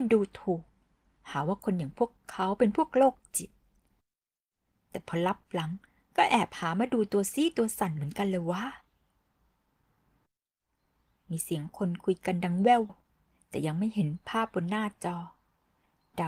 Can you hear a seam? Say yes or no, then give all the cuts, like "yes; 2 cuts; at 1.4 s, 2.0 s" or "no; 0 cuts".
yes; 1 cut; at 12.9 s